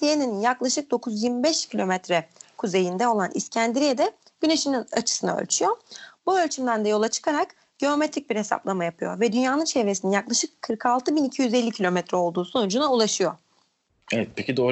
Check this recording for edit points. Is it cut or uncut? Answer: uncut